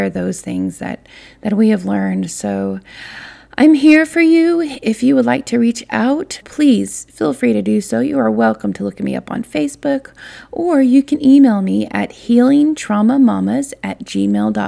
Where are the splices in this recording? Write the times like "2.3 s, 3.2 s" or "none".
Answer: 6.4 s

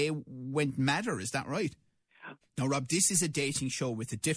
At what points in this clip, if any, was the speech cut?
2.4 s

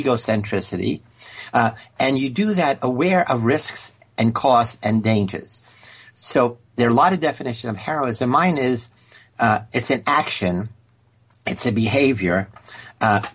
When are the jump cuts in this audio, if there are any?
none

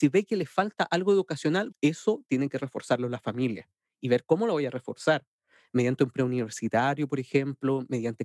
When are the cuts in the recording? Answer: 1.7 s

